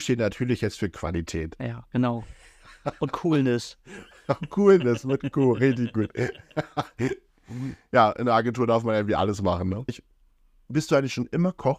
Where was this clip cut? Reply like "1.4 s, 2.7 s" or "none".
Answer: 9.9 s